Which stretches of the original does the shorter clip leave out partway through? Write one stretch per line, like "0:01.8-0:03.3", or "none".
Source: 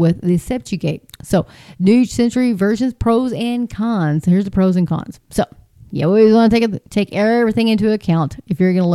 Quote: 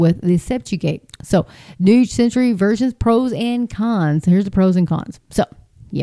none